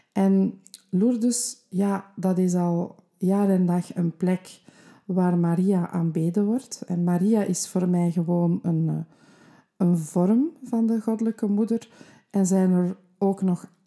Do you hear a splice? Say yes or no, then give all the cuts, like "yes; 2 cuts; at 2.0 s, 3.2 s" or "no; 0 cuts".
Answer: no; 0 cuts